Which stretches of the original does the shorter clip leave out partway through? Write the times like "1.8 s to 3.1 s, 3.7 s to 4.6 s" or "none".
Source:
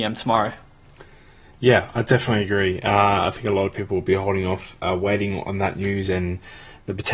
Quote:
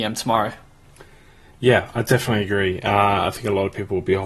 none